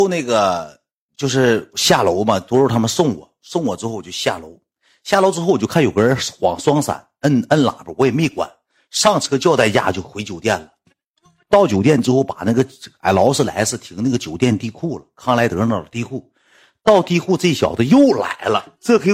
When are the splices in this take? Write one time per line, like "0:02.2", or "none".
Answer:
none